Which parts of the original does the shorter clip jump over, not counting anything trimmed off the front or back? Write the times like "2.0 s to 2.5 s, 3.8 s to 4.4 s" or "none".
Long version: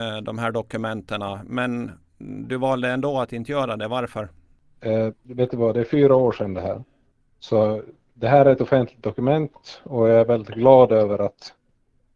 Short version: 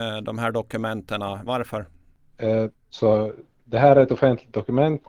1.5 s to 3.9 s, 5.2 s to 7.2 s